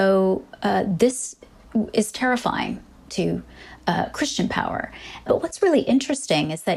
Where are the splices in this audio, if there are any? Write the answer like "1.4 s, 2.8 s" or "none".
3.1 s